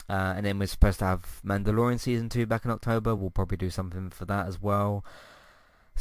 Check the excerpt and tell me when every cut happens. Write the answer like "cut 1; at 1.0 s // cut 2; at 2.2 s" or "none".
none